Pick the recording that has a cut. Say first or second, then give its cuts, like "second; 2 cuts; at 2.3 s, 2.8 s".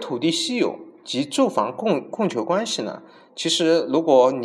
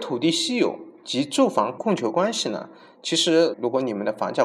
second; 2 cuts; at 1.8 s, 3.5 s